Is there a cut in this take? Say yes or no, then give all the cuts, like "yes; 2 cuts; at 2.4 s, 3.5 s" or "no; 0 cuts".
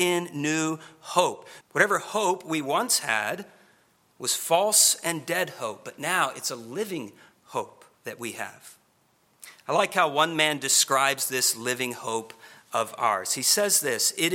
yes; 2 cuts; at 1.6 s, 7.9 s